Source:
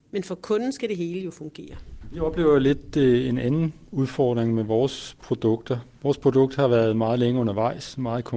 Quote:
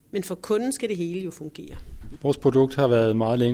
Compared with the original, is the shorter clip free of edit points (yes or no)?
no